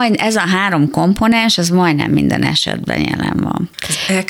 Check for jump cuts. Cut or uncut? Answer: uncut